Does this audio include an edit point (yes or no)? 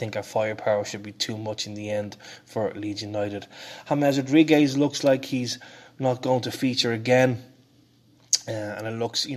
no